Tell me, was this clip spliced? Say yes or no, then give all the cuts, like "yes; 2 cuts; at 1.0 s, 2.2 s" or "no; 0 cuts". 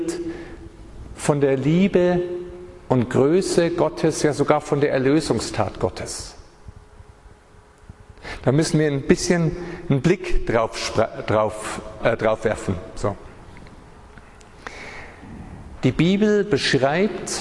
yes; 2 cuts; at 12.0 s, 15.8 s